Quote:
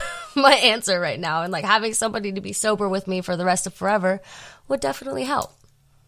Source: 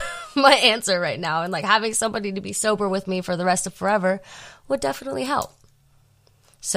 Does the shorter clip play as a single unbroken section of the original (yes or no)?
yes